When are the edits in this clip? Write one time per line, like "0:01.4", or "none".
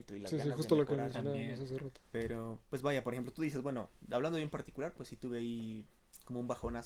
0:02.6